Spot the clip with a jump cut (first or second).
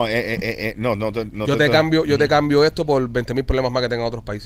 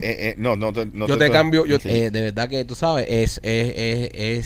second